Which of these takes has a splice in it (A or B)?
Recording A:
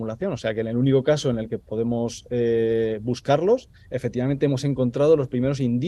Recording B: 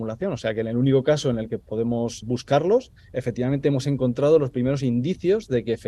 B